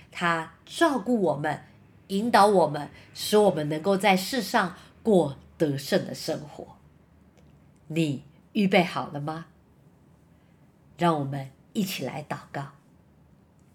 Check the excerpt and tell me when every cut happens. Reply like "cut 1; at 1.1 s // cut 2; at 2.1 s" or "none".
none